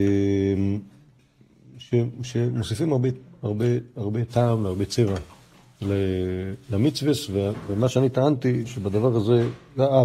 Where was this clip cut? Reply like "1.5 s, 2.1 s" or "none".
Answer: none